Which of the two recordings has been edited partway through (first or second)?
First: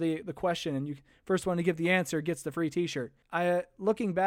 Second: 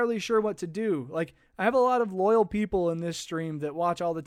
first